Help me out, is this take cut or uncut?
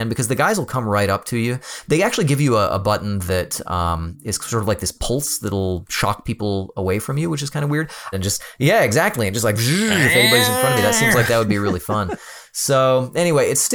cut